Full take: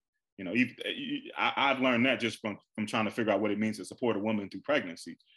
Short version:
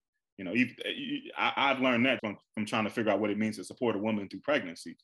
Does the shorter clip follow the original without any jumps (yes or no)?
no